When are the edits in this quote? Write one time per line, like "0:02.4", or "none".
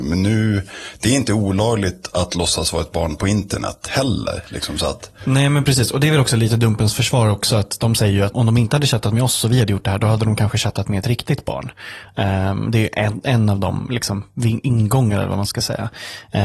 0:08.3

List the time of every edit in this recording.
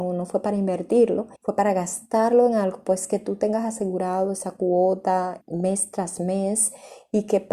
0:01.4
0:05.4

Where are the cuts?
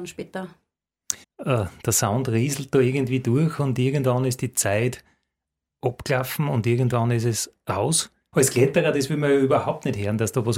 0:01.2
0:08.3

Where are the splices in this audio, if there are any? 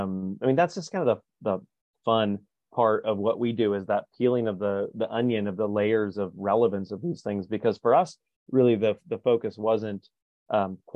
0:04.9

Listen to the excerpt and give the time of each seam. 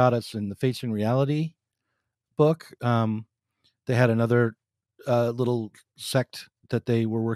none

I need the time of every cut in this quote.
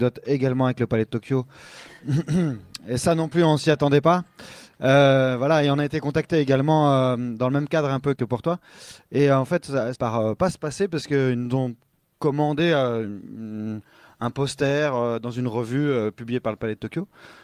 0:08.2
0:10.0

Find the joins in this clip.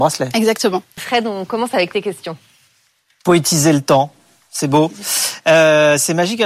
0:01.0

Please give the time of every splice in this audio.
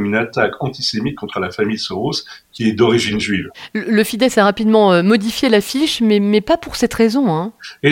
none

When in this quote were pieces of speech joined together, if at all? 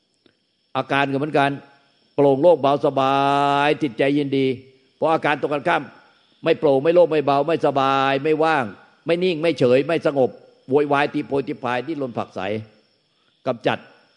none

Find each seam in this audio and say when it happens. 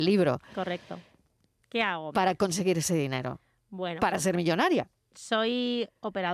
0:01.6

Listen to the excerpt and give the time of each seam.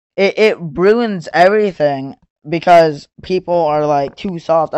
none

